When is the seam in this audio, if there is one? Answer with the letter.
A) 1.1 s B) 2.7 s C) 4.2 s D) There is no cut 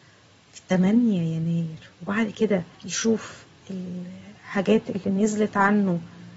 B